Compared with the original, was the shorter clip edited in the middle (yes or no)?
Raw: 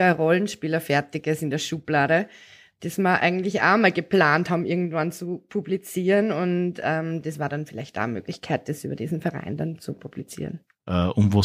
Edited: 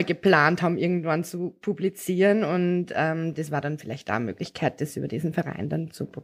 no